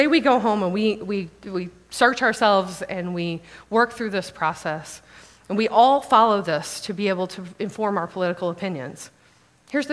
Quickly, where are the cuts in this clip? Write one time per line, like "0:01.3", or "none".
none